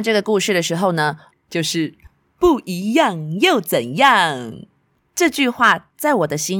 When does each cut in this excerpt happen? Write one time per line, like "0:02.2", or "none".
0:01.3